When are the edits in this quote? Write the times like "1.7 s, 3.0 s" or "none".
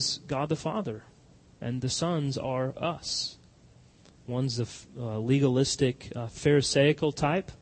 none